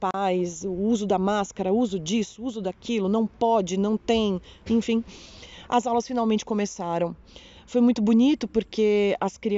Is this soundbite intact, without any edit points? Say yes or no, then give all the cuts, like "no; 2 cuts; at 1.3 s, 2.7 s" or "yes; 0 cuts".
yes; 0 cuts